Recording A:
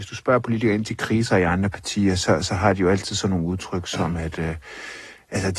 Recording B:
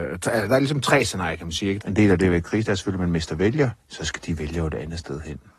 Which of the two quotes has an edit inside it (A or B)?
B